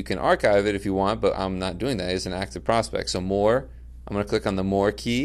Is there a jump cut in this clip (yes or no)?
no